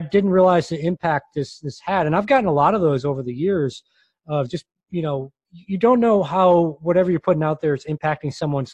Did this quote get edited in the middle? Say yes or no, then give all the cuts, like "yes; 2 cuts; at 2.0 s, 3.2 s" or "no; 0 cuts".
no; 0 cuts